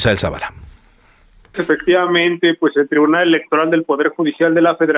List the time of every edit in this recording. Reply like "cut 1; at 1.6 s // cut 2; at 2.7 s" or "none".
cut 1; at 1.5 s